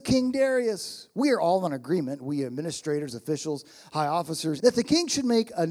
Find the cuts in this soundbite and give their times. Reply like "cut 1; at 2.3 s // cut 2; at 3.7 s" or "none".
cut 1; at 4.6 s